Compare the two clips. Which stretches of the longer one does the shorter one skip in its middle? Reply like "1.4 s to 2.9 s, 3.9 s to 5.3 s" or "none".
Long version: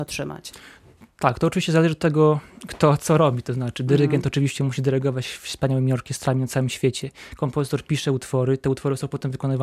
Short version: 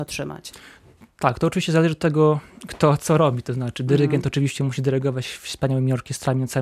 none